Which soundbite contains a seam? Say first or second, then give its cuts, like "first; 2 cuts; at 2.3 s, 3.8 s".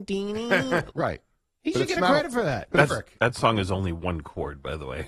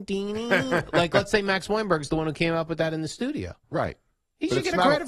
first; 2 cuts; at 0.9 s, 2.9 s